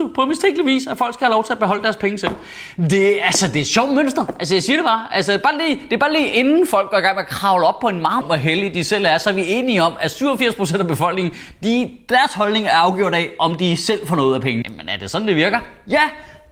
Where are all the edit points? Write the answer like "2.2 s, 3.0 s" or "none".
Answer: 8.2 s, 14.6 s